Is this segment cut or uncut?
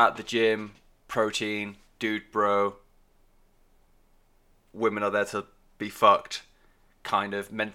uncut